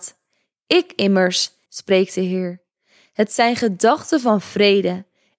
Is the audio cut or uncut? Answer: cut